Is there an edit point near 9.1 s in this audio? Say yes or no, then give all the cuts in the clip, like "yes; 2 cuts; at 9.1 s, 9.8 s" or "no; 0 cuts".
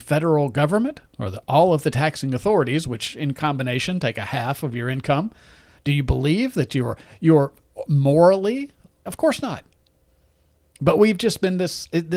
yes; 1 cut; at 9.1 s